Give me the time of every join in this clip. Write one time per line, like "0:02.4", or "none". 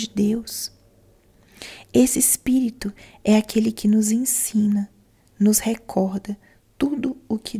none